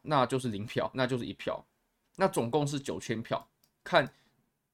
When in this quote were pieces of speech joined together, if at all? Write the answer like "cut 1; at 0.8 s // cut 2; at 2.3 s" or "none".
cut 1; at 0.9 s